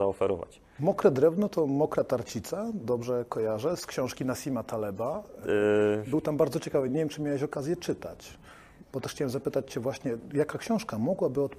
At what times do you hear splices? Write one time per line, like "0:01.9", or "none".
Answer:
none